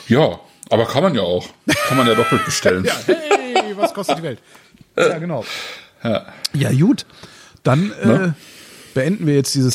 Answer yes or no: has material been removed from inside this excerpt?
no